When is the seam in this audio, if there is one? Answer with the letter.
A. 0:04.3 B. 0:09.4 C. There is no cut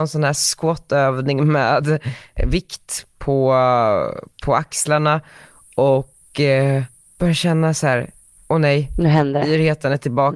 C